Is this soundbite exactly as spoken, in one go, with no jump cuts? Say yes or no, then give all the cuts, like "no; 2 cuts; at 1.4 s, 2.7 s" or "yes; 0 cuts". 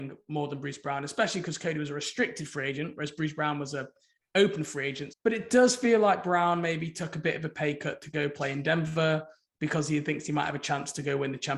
no; 1 cut; at 5.1 s